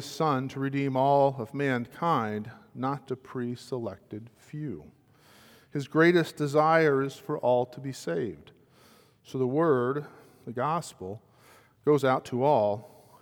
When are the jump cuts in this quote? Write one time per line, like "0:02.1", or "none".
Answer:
0:03.1